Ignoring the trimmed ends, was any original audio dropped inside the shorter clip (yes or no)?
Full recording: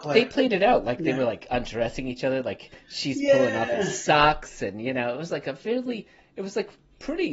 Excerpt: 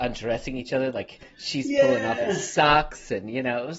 no